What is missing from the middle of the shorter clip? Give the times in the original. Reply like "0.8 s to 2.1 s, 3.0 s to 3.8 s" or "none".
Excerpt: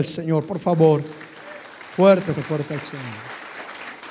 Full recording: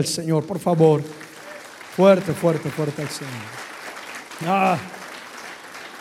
2.4 s to 2.6 s